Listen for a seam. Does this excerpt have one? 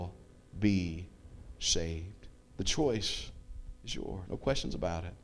yes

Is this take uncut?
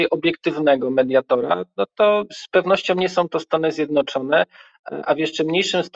yes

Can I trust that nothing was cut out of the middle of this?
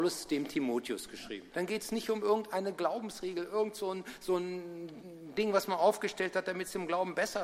no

